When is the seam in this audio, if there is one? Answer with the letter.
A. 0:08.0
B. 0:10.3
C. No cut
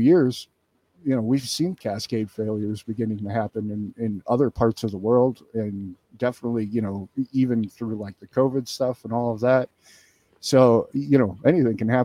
C